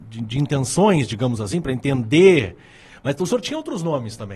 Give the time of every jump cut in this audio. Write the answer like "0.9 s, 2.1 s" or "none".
none